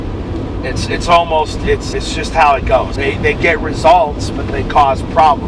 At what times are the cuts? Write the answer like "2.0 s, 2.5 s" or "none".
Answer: 1.9 s, 3.0 s